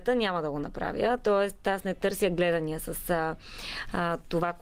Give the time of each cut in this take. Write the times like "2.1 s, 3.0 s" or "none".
none